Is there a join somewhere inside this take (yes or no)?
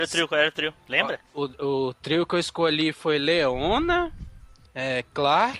no